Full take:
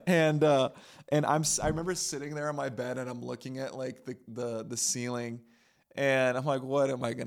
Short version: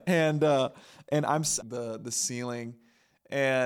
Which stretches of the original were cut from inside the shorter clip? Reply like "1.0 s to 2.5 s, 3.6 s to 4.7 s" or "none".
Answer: 1.6 s to 4.2 s